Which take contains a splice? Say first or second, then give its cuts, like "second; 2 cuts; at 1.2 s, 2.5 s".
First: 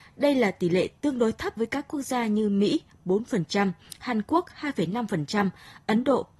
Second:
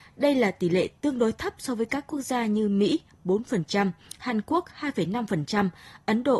first; 1 cut; at 1.6 s